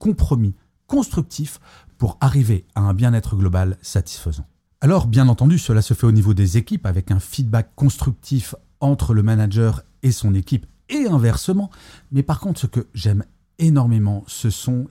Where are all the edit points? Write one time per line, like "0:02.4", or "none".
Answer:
none